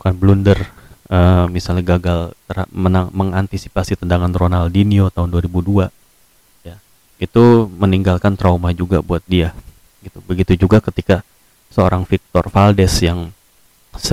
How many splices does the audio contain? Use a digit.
0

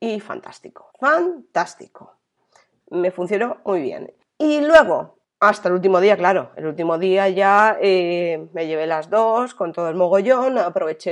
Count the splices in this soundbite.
0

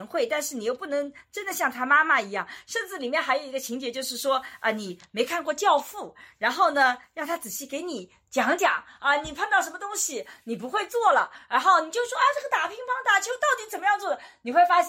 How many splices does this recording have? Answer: 0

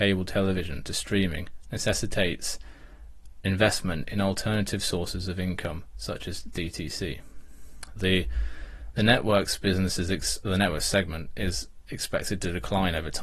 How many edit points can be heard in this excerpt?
1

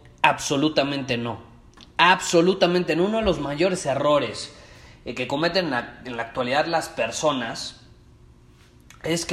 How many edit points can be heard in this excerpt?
0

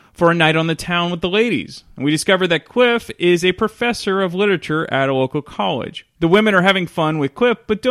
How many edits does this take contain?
1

